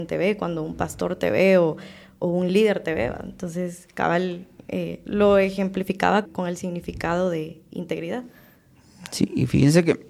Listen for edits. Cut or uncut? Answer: cut